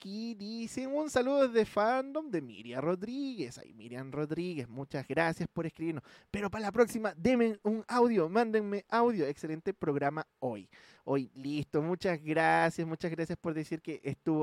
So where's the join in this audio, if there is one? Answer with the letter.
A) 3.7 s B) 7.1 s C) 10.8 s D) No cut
D